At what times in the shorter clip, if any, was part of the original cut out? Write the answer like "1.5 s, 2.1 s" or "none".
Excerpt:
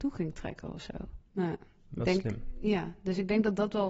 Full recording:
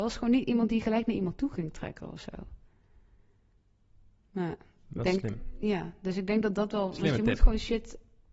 1.2 s